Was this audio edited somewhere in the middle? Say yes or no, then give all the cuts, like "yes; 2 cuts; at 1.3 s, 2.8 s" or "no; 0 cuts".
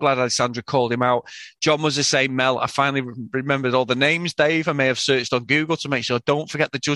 no; 0 cuts